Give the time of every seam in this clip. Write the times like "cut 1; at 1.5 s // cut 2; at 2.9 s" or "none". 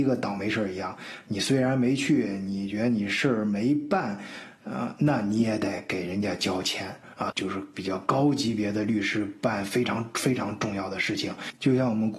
cut 1; at 7.3 s